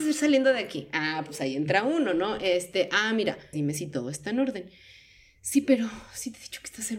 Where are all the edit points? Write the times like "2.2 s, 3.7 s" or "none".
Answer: 3.5 s